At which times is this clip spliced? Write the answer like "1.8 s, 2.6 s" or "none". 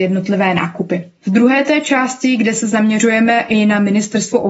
none